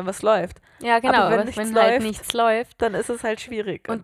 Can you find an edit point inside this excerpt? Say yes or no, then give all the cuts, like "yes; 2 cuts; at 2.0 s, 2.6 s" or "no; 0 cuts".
no; 0 cuts